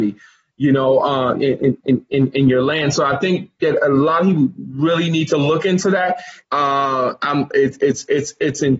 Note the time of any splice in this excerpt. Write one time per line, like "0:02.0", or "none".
0:06.4